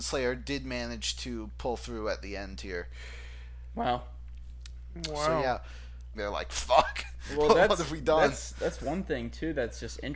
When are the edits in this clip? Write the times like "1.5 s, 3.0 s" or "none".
6.1 s